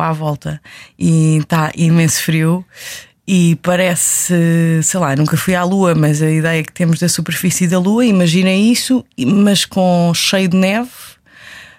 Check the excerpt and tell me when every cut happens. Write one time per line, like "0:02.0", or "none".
none